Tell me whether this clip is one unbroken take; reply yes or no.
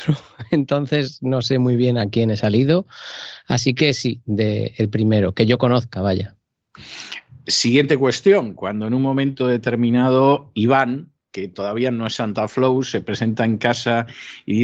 yes